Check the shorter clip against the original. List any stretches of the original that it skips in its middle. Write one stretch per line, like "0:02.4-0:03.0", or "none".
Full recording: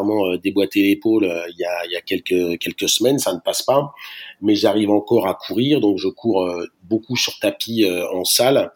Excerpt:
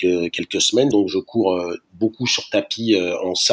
0:03.2-0:05.8